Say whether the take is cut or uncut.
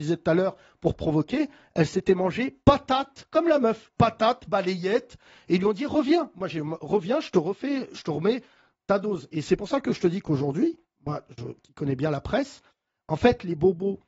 uncut